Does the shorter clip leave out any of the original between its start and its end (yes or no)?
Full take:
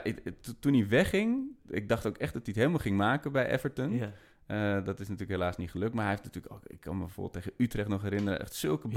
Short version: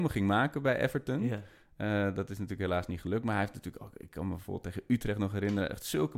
no